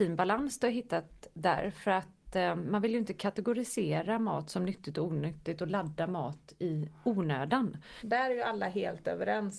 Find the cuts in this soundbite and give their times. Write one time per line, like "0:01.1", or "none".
0:08.0